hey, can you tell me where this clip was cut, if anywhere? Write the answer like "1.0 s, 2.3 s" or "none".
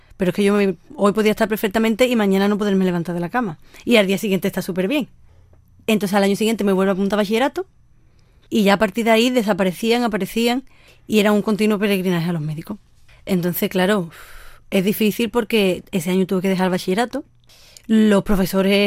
8.4 s